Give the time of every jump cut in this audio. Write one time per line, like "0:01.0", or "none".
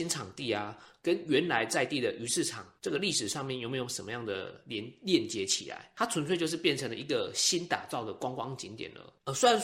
none